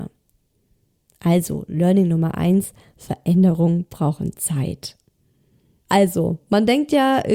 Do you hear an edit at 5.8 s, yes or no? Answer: yes